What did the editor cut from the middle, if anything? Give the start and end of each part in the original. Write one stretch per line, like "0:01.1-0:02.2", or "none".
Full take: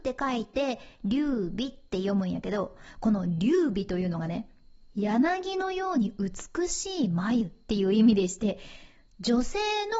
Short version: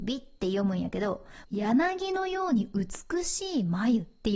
0:02.9-0:04.9